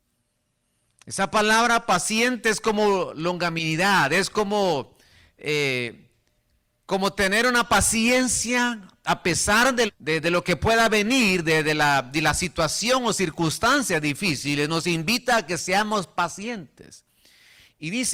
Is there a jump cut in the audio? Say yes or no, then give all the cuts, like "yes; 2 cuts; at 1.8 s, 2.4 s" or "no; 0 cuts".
yes; 1 cut; at 9.9 s